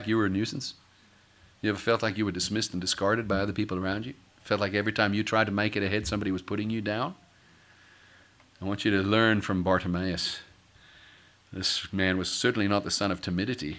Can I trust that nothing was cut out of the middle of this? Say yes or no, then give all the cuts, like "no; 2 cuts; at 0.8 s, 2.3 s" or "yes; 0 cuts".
yes; 0 cuts